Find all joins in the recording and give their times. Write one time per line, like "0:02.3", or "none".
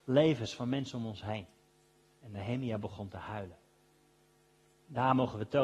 none